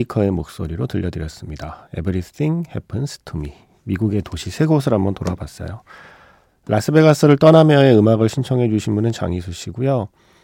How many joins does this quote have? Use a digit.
0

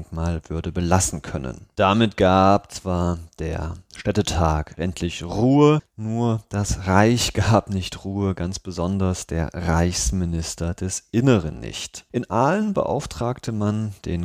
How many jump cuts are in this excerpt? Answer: 1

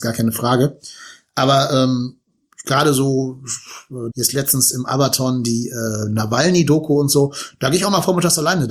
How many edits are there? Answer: 1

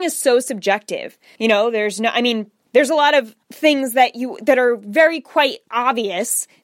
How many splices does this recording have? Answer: 1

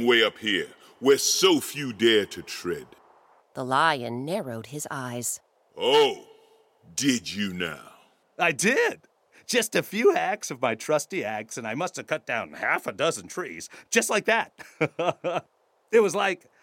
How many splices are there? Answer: 1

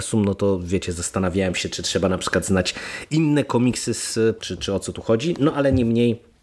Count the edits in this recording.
1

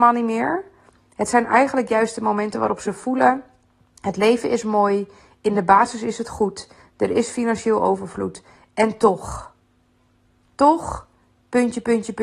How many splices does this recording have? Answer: 0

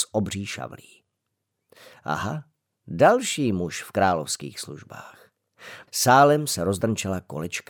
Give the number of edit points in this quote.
1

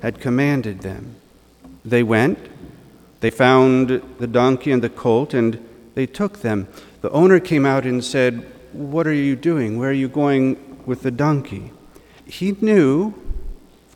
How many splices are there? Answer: 2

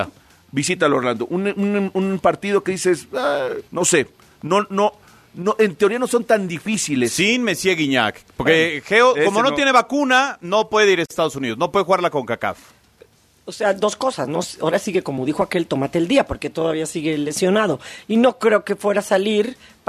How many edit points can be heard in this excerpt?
1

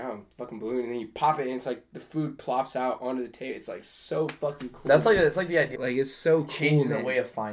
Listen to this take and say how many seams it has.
1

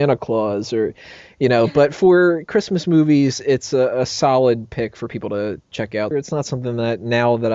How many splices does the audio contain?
1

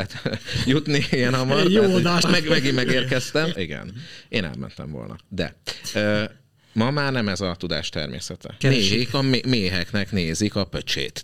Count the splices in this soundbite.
3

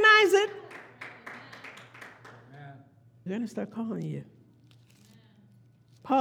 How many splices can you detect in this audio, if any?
1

